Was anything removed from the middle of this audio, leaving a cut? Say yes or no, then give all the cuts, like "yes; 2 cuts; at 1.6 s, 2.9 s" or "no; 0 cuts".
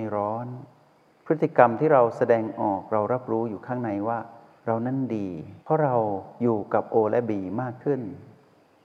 yes; 1 cut; at 5.6 s